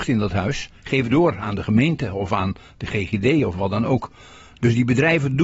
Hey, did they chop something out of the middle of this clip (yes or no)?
yes